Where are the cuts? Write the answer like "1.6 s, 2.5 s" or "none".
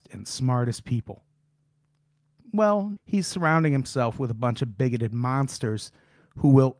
3.0 s